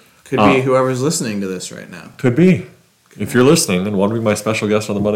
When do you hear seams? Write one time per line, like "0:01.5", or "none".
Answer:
none